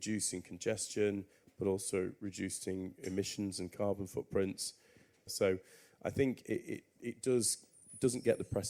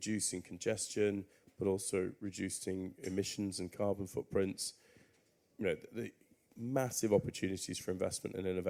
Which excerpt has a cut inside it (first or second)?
first